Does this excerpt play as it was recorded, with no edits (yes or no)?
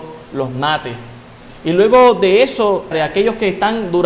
no